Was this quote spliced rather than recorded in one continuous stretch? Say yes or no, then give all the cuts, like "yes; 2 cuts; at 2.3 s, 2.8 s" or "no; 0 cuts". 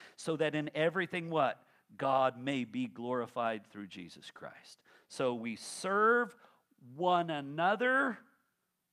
no; 0 cuts